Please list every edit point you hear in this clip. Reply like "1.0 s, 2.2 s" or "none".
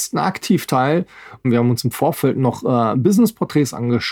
1.4 s